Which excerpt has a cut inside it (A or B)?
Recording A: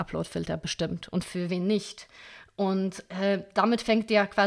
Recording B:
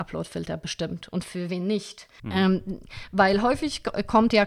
B